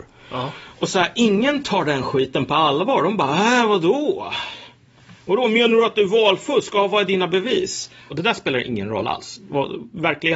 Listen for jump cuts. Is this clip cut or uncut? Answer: cut